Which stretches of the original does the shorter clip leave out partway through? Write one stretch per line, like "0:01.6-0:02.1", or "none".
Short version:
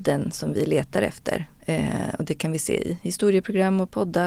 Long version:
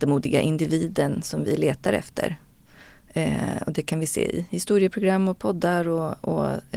0:02.5-0:03.0